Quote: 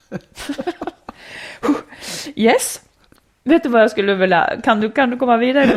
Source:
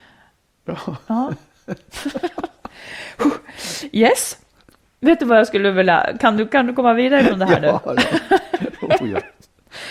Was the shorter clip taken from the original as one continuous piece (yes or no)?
yes